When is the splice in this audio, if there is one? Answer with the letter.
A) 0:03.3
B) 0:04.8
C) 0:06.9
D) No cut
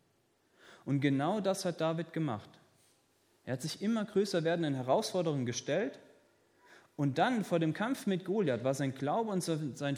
D